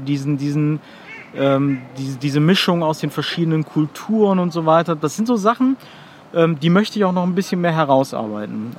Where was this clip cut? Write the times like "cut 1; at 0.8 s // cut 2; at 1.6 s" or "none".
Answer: none